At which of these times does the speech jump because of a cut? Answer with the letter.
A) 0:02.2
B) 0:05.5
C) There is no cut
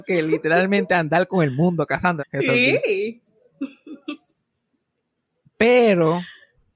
A